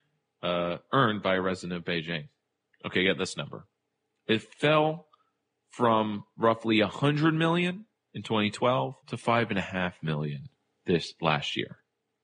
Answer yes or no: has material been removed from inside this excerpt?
yes